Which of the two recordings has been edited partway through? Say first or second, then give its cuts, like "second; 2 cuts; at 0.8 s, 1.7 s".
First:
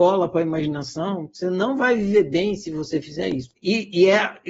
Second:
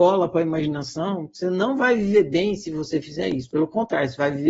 first; 1 cut; at 3.5 s